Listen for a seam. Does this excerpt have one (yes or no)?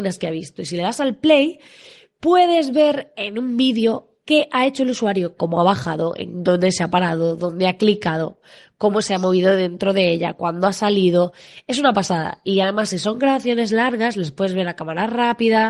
yes